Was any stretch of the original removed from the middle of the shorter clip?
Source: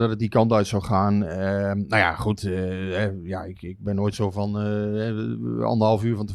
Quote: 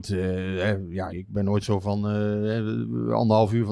yes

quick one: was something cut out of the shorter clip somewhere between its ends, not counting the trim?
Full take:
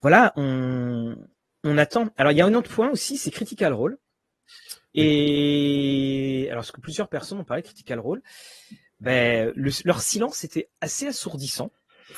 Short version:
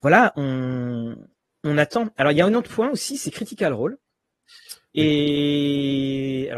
no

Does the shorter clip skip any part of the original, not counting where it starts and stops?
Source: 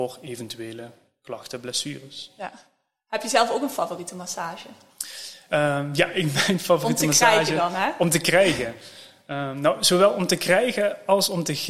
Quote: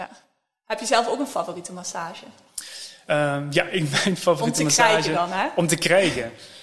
no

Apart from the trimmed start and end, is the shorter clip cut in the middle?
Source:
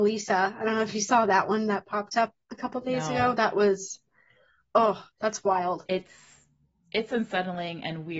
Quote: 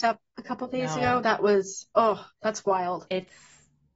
yes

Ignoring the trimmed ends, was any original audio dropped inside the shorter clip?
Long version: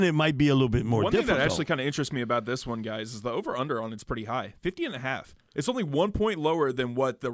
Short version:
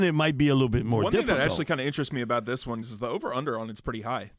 yes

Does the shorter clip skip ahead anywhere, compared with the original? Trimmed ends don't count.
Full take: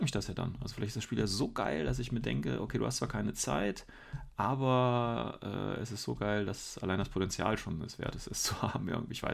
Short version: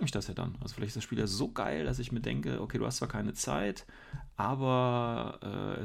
no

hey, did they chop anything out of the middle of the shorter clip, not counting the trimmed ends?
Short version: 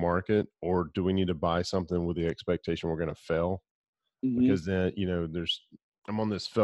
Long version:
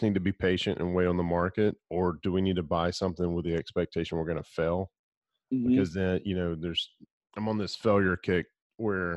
no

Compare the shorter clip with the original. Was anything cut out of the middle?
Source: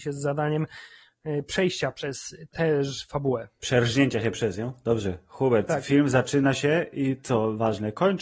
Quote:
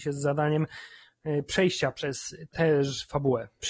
no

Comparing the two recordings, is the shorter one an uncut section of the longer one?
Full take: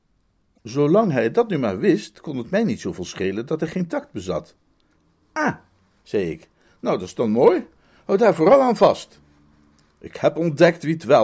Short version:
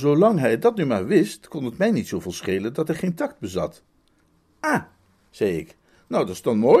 yes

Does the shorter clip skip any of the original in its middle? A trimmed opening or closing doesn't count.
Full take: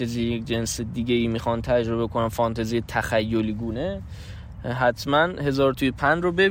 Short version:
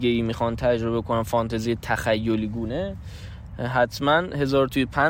no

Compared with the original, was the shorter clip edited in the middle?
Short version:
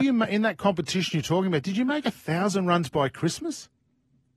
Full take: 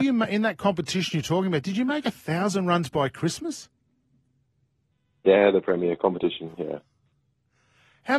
no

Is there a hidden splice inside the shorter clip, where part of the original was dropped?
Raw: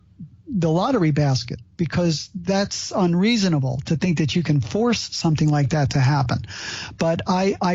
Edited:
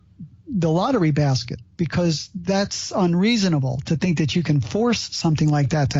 no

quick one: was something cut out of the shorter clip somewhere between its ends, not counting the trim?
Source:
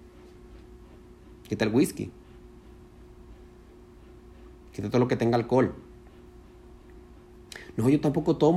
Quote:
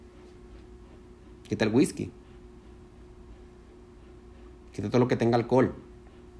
no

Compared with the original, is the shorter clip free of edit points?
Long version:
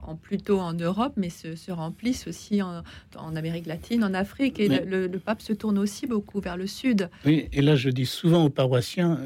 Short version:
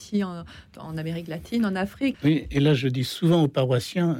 no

